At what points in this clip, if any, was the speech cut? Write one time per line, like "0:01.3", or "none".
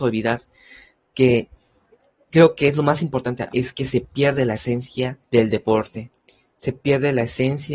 0:03.5
0:05.2

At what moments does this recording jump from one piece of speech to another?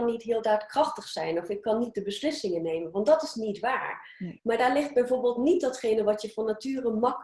0:04.4

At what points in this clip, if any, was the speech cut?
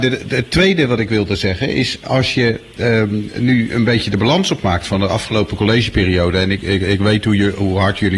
none

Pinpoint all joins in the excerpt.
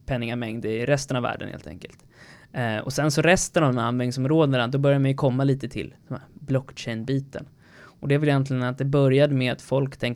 none

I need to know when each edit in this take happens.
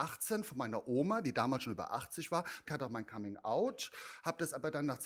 0:02.7

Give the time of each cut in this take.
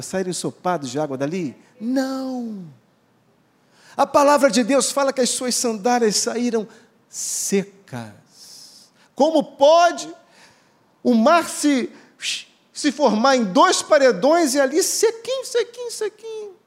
none

